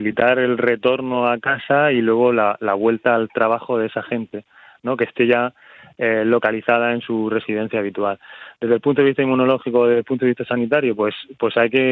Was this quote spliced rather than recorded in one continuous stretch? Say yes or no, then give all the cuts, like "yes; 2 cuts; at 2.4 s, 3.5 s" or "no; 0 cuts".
no; 0 cuts